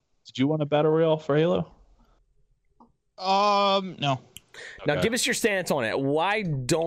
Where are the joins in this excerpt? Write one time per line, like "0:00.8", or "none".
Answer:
0:04.0